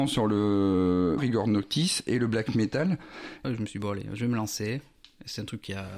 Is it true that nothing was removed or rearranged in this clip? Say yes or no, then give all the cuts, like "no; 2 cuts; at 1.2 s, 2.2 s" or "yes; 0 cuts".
no; 2 cuts; at 1.2 s, 3.4 s